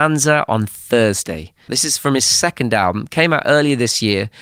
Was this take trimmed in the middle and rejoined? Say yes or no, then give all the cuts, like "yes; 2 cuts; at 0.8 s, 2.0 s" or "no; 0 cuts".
yes; 1 cut; at 1.7 s